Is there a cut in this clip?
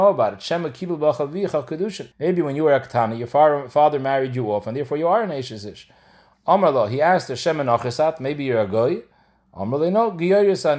yes; 2 cuts; at 2.1 s, 6.3 s

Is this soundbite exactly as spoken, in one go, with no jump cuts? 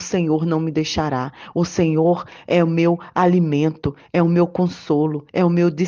yes; 0 cuts

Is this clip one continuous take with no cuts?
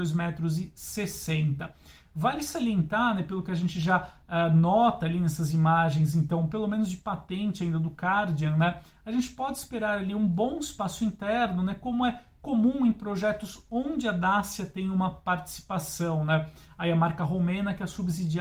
yes; 0 cuts

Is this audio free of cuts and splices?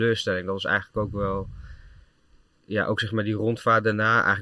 yes; 0 cuts

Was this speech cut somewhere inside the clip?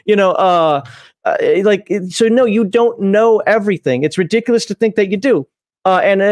no; 0 cuts

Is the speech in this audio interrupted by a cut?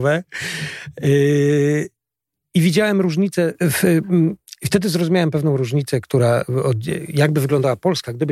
no; 0 cuts

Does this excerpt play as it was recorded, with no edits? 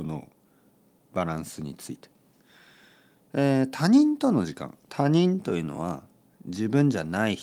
yes; 0 cuts

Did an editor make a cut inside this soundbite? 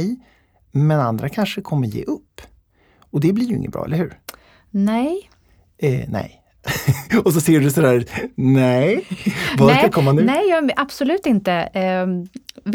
no; 0 cuts

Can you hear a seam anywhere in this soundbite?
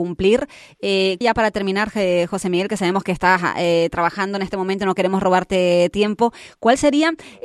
yes; 1 cut; at 1.2 s

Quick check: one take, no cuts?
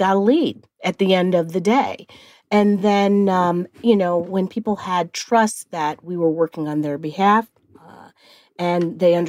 yes; 0 cuts

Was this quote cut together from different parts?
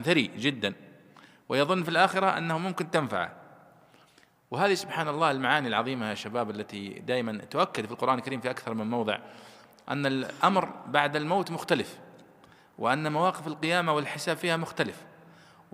no; 0 cuts

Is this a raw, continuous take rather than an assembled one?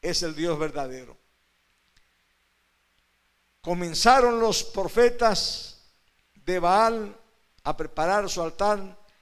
yes; 0 cuts

